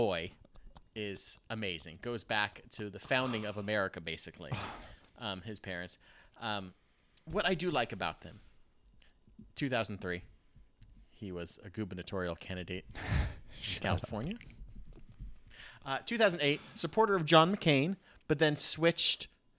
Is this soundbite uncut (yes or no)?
yes